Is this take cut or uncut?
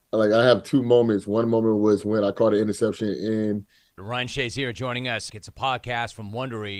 cut